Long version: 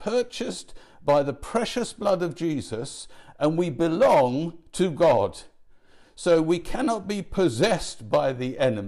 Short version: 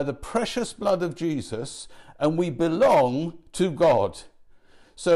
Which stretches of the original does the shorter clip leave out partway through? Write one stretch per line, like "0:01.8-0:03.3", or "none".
none